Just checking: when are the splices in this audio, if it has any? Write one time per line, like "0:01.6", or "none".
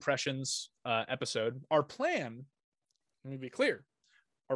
none